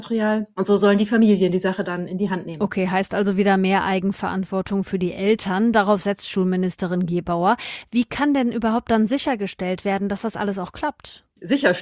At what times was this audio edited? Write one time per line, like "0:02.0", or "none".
none